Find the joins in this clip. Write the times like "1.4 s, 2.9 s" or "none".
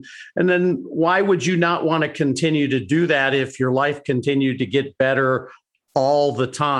none